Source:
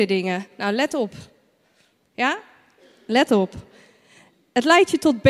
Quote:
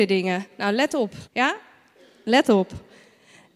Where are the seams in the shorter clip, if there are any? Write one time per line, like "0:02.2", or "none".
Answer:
0:01.3